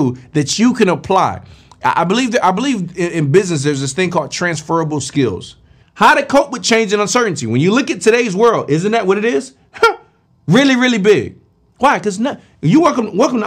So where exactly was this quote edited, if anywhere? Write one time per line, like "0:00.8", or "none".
0:05.8
0:10.3

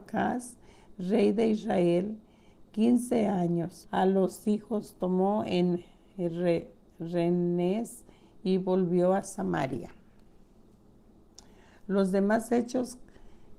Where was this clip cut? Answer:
0:03.8

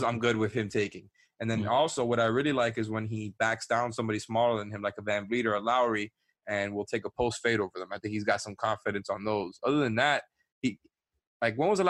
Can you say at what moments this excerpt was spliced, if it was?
none

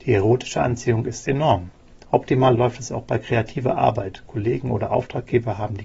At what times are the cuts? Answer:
0:02.0

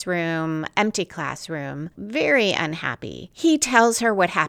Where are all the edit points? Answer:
0:02.0

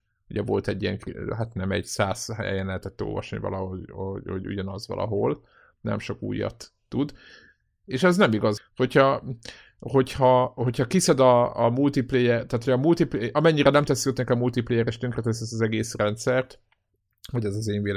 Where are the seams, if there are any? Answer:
0:08.6

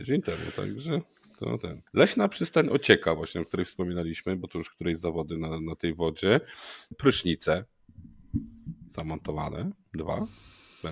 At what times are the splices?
0:01.9
0:06.9

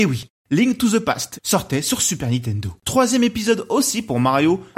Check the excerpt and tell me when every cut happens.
0:01.4

